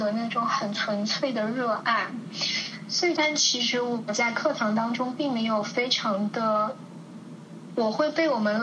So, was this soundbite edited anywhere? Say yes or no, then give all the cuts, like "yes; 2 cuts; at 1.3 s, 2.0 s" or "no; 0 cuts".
yes; 2 cuts; at 3.1 s, 7.7 s